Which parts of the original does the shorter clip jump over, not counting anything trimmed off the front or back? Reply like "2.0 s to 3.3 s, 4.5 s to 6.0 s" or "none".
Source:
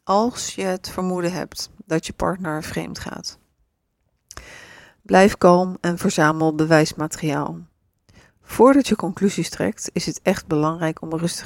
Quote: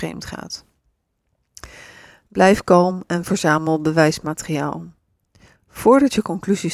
none